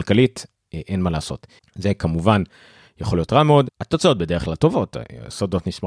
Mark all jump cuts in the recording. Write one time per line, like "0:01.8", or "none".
0:01.6
0:03.7